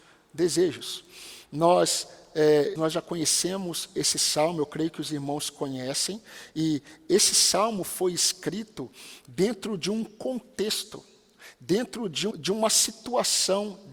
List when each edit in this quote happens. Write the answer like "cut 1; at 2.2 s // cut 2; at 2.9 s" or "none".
cut 1; at 2.8 s // cut 2; at 12.3 s